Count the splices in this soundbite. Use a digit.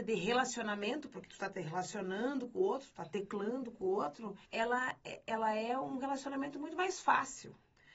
1